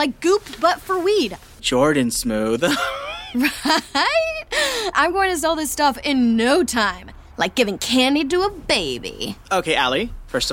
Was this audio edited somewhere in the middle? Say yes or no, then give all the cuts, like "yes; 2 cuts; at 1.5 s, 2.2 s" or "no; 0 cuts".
yes; 2 cuts; at 1.6 s, 4.9 s